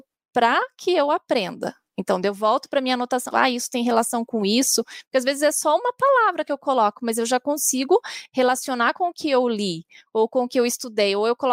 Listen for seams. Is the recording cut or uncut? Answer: cut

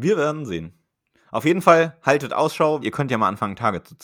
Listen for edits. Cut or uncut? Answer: cut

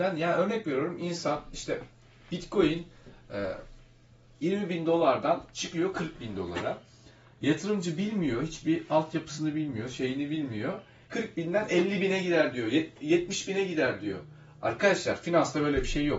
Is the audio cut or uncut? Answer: cut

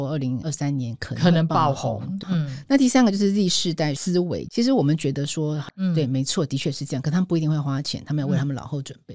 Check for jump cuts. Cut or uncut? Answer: cut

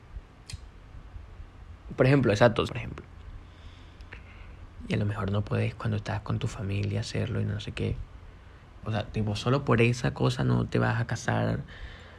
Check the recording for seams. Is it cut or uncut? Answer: cut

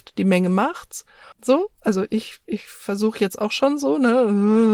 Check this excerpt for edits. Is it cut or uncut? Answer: cut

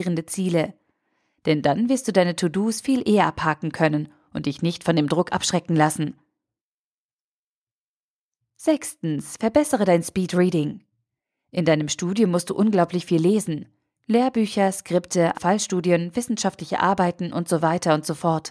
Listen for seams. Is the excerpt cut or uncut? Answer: cut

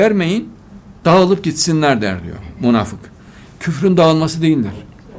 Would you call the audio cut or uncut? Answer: cut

